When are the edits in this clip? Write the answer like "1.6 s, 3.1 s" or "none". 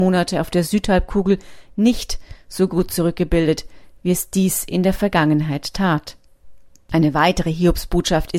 none